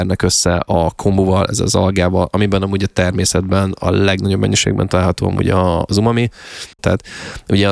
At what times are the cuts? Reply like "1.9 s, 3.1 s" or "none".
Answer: 6.8 s